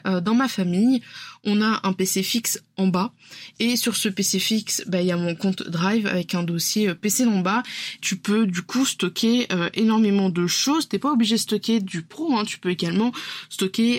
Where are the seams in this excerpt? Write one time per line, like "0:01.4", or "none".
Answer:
0:08.0